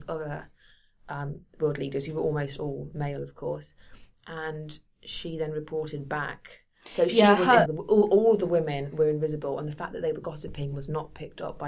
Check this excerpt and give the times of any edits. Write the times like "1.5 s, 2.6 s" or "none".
7.7 s